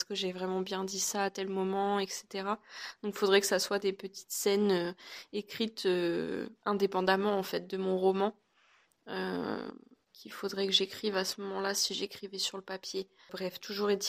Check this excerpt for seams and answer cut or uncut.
uncut